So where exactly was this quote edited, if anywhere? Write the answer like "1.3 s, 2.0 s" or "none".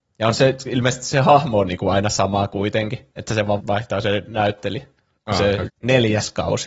3.6 s, 5.7 s